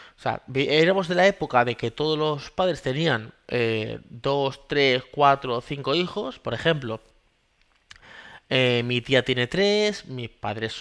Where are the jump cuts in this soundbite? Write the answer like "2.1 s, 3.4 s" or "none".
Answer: none